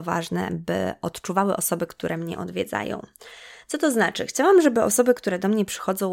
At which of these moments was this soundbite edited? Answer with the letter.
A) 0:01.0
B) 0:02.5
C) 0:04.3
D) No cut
D